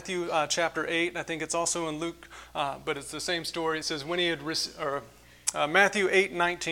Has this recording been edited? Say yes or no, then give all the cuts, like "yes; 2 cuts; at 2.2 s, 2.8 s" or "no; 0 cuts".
no; 0 cuts